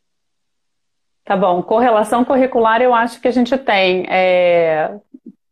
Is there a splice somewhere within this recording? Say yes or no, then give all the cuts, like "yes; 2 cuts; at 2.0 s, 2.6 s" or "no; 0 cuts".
no; 0 cuts